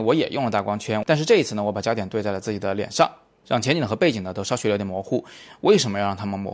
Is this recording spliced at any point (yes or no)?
no